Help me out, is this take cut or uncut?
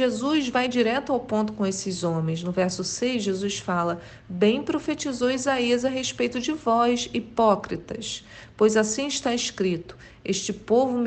uncut